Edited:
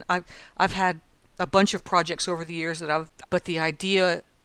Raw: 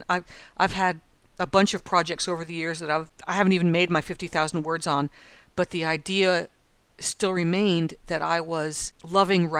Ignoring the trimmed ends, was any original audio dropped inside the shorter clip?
yes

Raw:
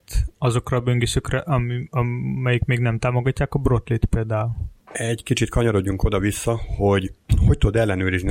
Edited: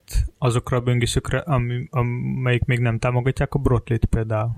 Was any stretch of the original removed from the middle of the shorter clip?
no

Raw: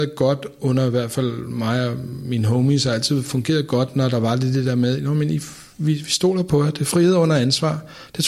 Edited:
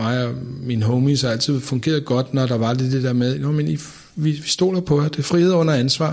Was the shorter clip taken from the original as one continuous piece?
yes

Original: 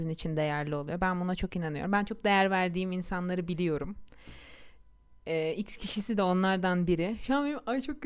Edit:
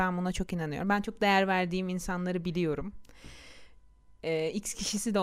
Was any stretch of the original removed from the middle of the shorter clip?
no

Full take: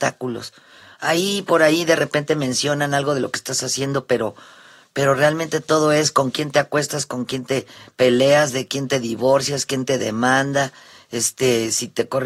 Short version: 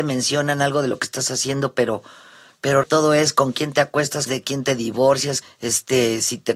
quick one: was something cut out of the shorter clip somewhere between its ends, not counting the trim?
yes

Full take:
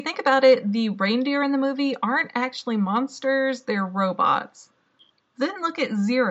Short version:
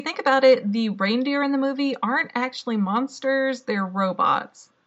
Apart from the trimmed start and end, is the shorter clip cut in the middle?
no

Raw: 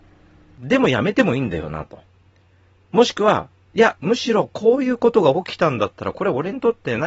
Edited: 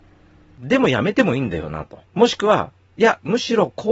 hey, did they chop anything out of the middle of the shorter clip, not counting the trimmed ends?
yes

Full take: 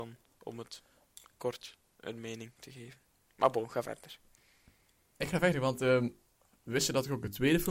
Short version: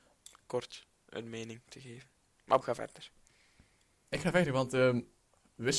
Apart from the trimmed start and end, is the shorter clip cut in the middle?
yes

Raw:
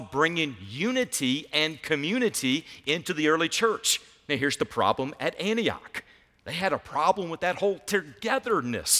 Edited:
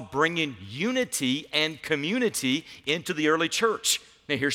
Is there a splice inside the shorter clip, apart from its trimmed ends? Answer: no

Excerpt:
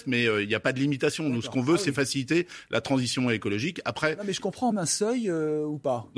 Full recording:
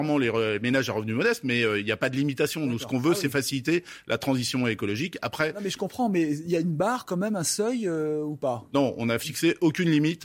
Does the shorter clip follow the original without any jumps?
no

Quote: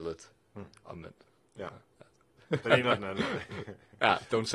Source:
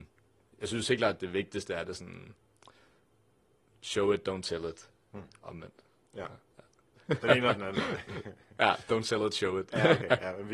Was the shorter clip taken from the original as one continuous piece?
yes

